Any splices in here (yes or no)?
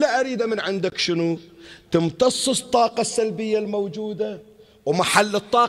no